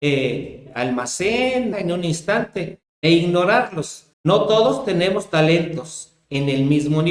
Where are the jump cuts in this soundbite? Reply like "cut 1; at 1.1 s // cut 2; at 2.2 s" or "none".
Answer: cut 1; at 1.7 s // cut 2; at 4.1 s